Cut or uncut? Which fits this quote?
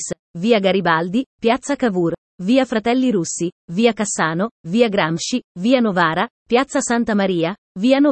uncut